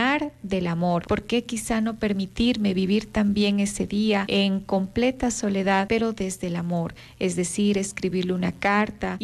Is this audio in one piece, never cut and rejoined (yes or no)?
no